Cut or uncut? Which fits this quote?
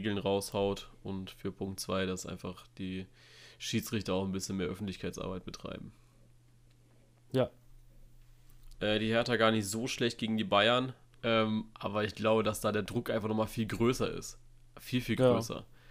cut